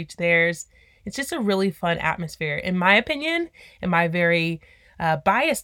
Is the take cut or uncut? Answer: uncut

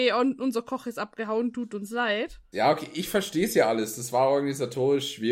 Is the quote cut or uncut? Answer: cut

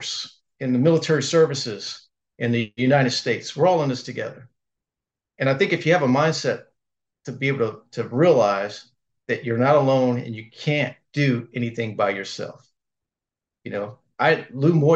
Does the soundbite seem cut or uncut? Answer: uncut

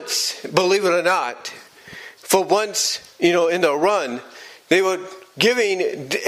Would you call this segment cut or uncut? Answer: uncut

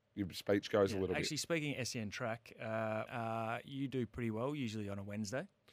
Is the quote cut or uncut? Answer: cut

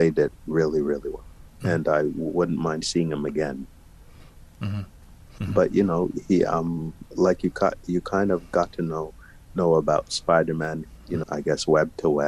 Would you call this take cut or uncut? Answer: cut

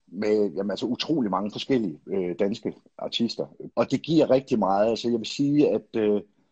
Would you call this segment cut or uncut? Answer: cut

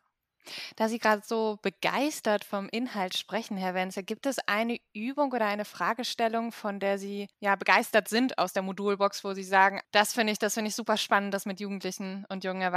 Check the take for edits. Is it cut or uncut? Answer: uncut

